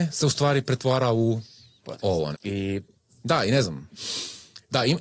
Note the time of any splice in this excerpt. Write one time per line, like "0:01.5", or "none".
0:02.3